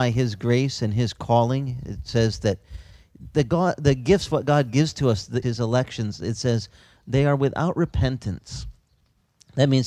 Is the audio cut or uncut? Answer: cut